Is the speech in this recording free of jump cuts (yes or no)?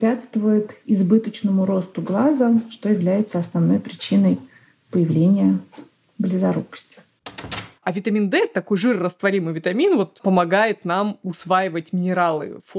no